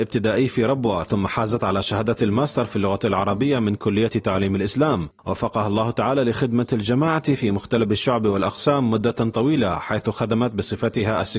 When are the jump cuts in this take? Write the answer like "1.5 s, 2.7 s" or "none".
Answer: none